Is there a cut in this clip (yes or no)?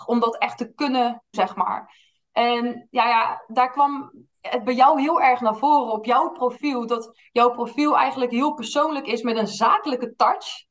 yes